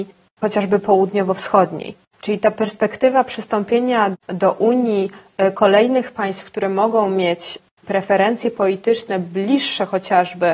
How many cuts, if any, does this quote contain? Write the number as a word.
one